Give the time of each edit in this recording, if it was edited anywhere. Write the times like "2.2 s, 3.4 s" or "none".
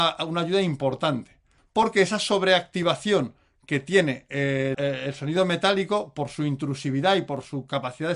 1.6 s, 4.7 s